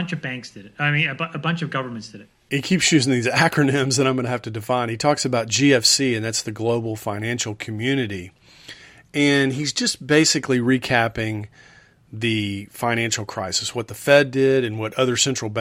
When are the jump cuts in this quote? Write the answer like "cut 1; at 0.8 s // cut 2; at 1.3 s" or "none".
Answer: none